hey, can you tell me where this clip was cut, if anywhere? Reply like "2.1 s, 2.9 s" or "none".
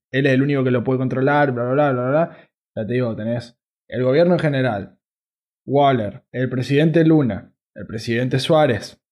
2.6 s, 6.3 s